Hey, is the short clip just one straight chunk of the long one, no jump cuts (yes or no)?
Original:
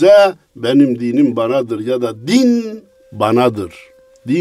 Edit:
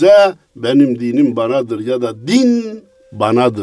yes